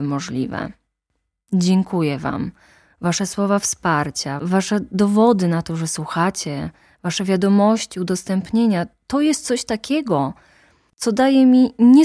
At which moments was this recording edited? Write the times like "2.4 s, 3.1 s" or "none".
none